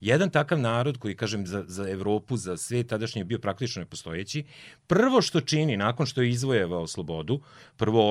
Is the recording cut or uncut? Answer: uncut